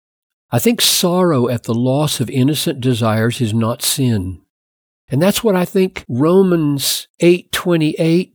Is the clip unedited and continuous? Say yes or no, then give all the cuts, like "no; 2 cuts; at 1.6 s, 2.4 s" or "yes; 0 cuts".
no; 1 cut; at 5.1 s